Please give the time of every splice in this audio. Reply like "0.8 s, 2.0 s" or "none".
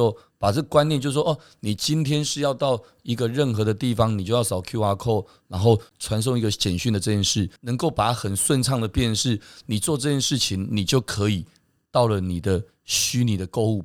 none